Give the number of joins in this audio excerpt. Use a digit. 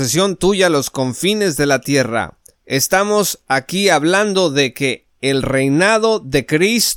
1